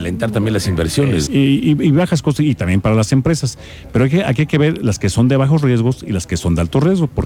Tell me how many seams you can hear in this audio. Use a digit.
1